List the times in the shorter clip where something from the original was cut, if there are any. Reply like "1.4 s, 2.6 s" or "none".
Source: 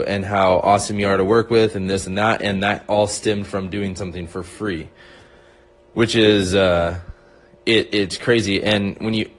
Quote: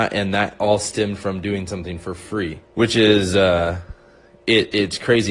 2.6 s